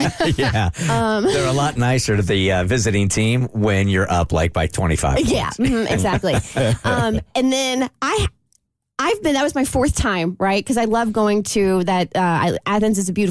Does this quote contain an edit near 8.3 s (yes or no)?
no